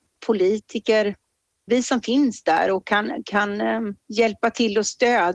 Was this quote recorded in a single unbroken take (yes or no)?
no